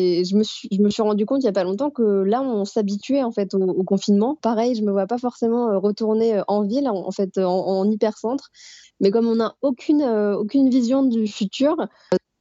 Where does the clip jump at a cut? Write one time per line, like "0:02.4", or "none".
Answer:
0:04.4
0:08.8

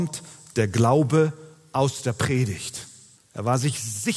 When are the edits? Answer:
0:03.2

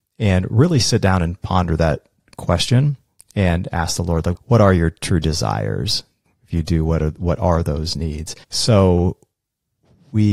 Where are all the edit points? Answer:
0:06.3
0:08.4

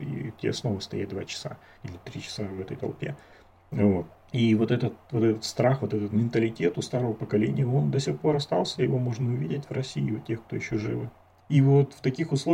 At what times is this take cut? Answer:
none

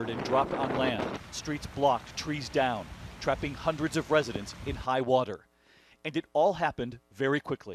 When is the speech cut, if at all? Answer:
none

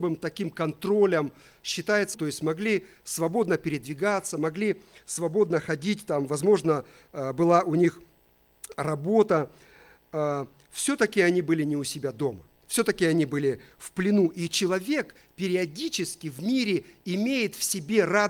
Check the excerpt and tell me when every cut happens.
0:02.1

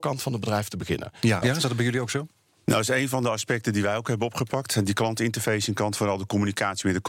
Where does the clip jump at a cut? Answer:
0:01.4

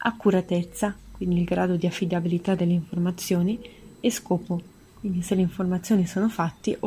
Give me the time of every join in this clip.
none

